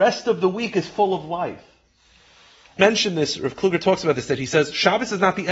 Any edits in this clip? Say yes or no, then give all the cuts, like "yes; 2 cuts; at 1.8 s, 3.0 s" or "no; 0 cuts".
yes; 1 cut; at 2.8 s